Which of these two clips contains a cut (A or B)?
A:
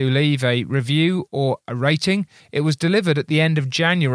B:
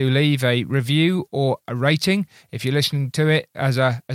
A